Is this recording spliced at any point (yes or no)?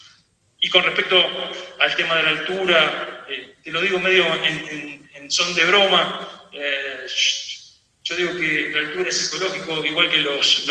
no